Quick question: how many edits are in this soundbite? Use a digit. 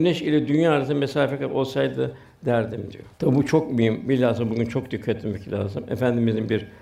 1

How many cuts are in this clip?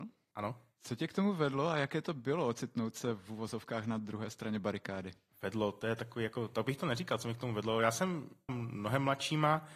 1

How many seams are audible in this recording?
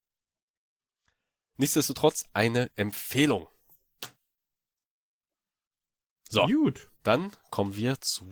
1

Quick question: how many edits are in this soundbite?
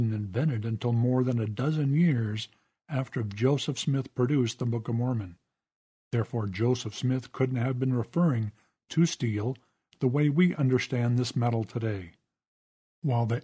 0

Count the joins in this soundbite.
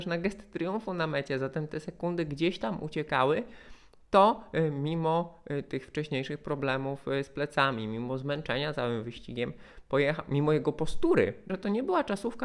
1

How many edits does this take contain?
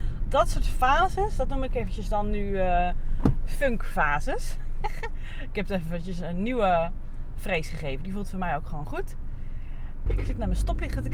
1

